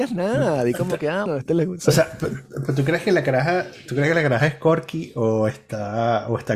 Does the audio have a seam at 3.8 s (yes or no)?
no